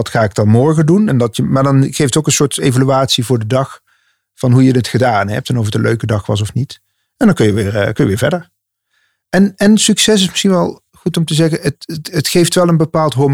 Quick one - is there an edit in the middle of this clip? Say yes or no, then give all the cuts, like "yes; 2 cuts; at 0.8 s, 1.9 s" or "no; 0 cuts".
no; 0 cuts